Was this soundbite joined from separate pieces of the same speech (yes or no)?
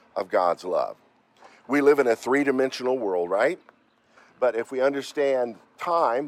no